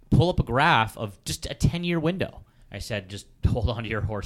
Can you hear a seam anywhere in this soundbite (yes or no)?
yes